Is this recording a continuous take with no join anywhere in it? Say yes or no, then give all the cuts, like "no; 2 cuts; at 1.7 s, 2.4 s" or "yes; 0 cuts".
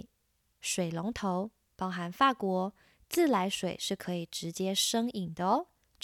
no; 1 cut; at 1.8 s